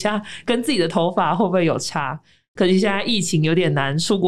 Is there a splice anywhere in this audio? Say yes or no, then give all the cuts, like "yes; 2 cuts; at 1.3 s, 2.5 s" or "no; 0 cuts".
no; 0 cuts